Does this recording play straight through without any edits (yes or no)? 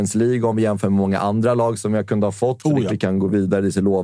no